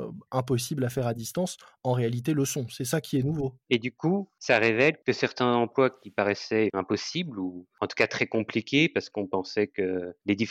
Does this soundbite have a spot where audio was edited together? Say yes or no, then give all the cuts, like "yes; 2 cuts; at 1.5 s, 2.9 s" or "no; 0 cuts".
yes; 2 cuts; at 3.6 s, 6.7 s